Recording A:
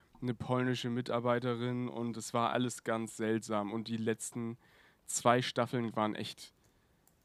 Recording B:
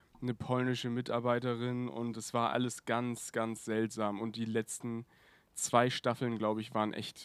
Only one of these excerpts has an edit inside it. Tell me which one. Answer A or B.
A